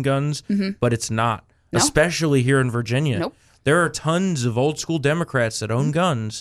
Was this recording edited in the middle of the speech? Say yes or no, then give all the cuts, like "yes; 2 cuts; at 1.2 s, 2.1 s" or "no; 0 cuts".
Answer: no; 0 cuts